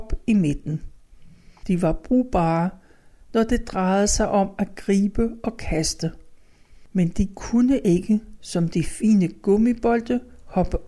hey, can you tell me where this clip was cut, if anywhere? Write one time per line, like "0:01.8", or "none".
none